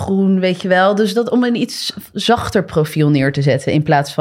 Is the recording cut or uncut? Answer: uncut